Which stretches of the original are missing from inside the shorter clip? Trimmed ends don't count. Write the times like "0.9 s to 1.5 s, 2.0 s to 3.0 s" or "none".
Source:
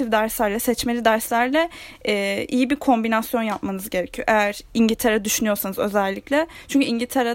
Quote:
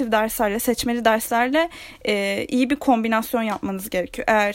none